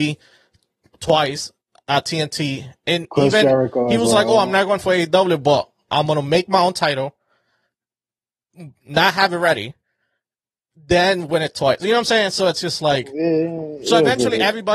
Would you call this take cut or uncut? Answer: uncut